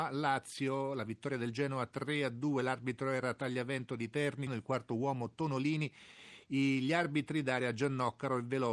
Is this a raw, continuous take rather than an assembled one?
no; 1 cut; at 4.5 s

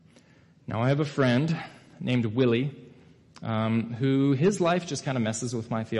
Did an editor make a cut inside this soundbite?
no; 0 cuts

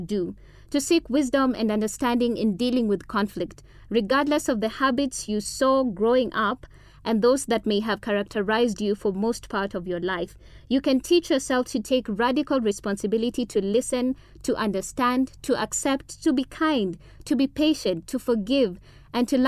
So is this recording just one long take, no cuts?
yes; 0 cuts

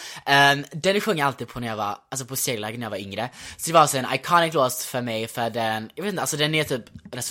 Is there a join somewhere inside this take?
no; 0 cuts

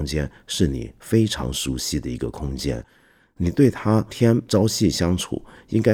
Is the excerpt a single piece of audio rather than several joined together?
no; 1 cut; at 4.1 s

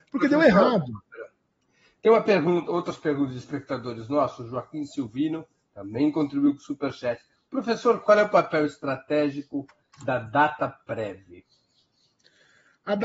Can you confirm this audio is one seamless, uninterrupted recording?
yes; 0 cuts

